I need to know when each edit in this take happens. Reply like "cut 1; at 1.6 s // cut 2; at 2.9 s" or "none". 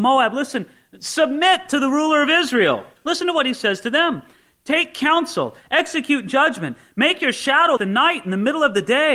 cut 1; at 3.0 s // cut 2; at 7.8 s